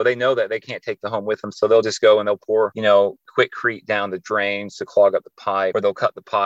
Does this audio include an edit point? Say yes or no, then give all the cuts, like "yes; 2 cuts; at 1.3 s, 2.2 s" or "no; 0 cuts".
no; 0 cuts